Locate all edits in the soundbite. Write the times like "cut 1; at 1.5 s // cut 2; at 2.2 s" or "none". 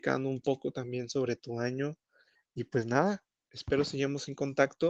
none

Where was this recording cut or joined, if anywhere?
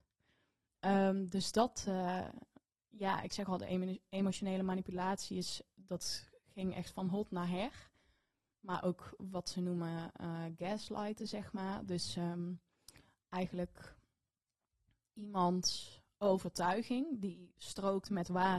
none

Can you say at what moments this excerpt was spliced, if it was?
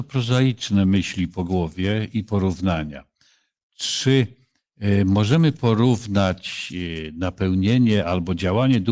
none

